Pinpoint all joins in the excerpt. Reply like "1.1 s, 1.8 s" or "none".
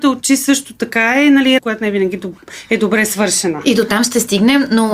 1.6 s